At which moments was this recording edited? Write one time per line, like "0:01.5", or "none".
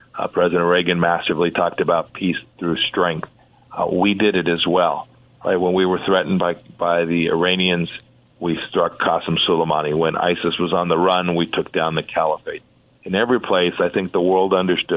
none

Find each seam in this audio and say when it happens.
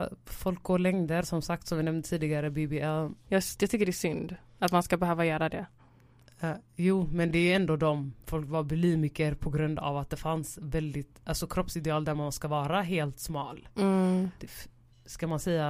0:03.2
0:08.2
0:14.4

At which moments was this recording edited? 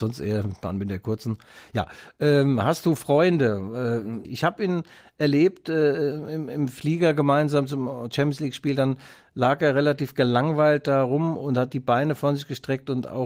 0:04.2

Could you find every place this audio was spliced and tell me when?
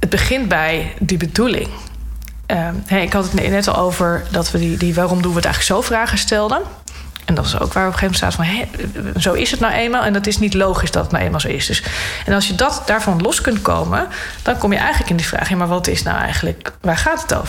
0:09.1

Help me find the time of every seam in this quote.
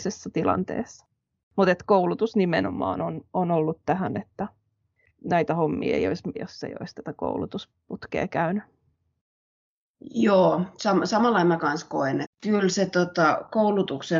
0:06.3
0:12.2

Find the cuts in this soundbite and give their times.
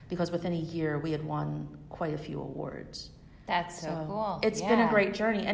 none

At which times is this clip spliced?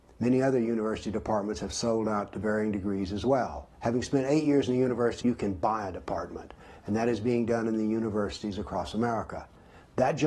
0:03.7
0:05.2

